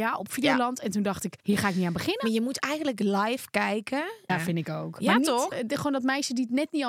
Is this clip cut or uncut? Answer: cut